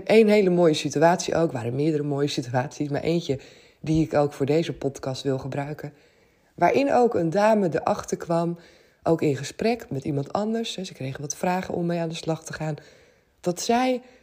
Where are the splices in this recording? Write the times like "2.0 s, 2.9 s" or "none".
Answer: 9.9 s